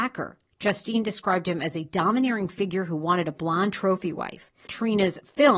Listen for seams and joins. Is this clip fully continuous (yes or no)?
no